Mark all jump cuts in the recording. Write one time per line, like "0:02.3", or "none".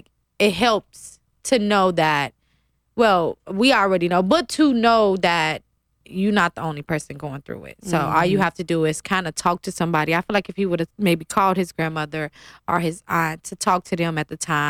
none

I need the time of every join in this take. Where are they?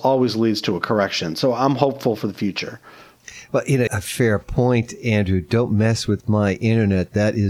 0:03.9

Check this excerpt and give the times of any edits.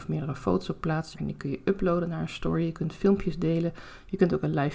0:01.1

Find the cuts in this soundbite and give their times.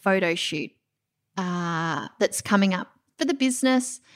none

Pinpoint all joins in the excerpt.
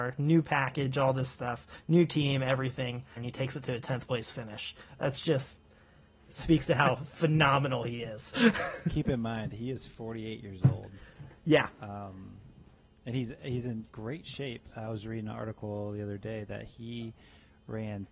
0:03.2

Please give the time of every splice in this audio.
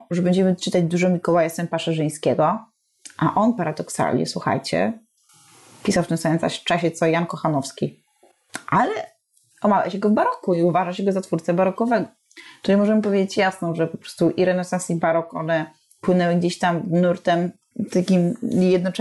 none

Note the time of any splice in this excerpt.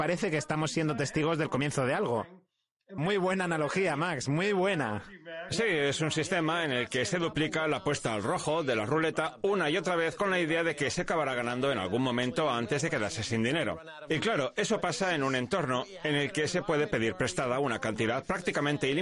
0:03.0

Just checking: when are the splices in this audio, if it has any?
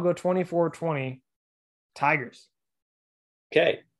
none

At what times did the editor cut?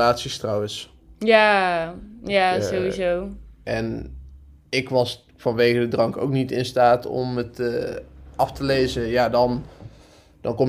0:03.6

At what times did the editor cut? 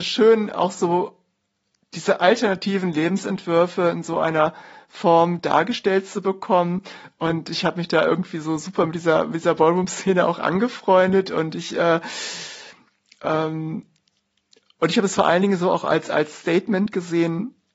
none

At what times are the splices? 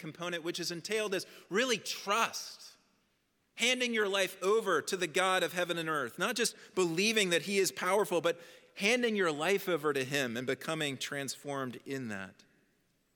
none

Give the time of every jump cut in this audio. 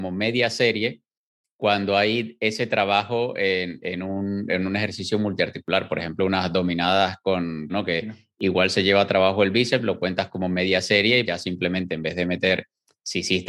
0:07.7
0:11.2

